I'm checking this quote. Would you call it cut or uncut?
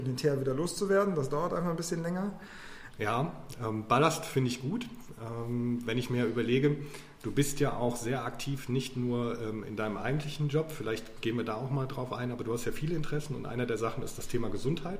cut